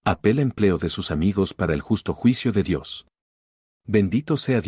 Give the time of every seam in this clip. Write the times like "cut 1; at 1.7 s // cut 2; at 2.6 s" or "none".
cut 1; at 3.7 s